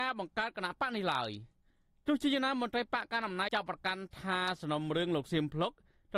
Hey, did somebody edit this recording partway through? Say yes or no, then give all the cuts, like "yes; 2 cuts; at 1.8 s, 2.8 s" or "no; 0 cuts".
yes; 1 cut; at 3.5 s